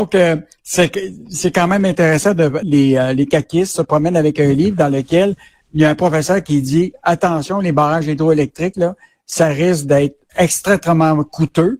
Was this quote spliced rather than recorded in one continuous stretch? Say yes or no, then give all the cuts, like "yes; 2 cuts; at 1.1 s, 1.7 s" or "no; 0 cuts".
yes; 2 cuts; at 2.6 s, 10.3 s